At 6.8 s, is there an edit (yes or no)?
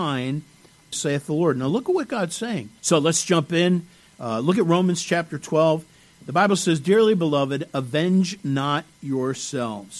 no